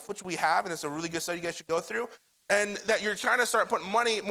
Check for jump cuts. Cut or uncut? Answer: cut